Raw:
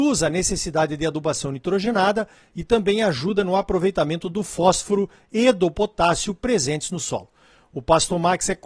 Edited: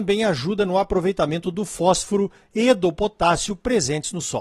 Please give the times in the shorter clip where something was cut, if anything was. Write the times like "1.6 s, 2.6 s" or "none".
none